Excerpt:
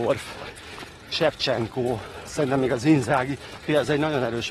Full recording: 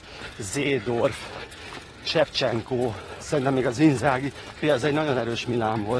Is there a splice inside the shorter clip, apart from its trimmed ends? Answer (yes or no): no